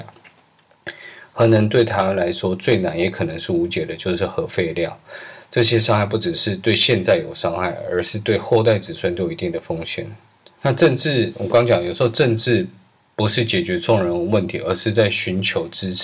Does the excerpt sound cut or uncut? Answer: cut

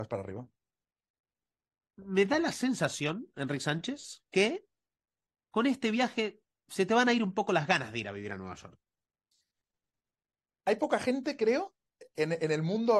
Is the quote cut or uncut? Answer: uncut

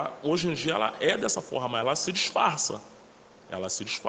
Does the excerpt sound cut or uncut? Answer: uncut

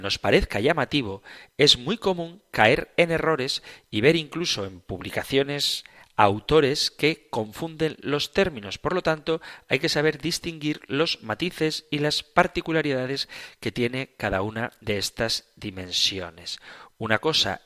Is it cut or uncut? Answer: uncut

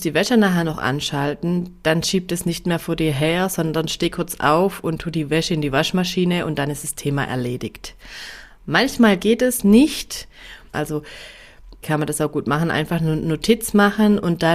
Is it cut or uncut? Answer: cut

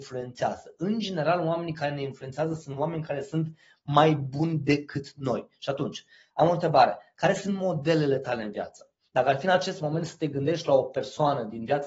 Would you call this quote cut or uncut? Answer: uncut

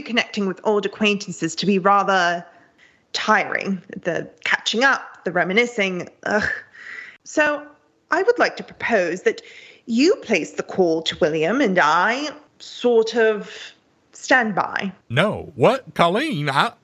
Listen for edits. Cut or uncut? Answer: cut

